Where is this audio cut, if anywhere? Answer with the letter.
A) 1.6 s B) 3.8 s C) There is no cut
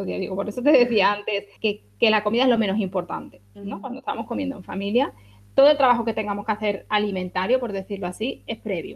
A